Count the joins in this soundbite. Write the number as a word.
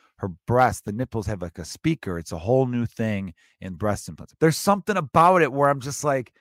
one